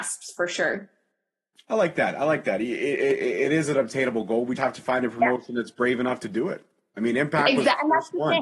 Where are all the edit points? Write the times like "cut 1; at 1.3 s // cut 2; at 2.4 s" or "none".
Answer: cut 1; at 4.6 s